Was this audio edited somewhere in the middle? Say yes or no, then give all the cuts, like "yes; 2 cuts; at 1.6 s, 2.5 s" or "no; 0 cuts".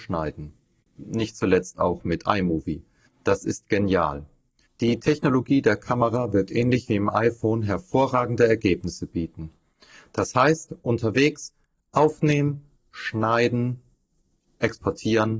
yes; 2 cuts; at 3.1 s, 4.6 s